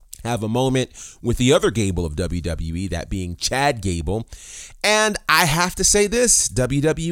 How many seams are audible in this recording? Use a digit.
0